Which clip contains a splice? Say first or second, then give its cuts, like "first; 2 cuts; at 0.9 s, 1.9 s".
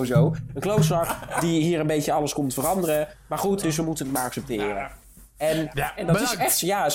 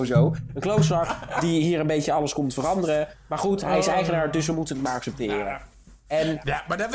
first; 2 cuts; at 3.6 s, 5.9 s